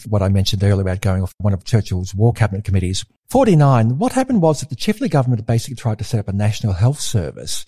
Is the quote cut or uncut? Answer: cut